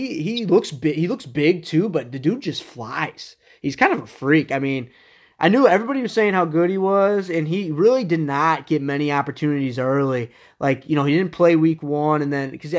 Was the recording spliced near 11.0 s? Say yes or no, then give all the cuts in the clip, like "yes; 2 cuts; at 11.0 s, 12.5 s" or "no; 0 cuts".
no; 0 cuts